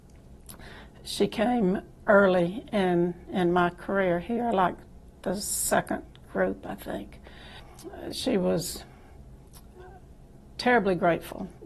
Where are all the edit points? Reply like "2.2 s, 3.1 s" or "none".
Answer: none